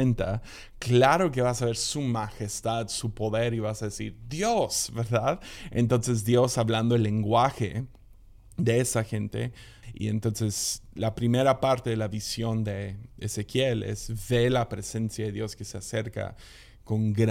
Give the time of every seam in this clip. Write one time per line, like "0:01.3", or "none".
0:09.8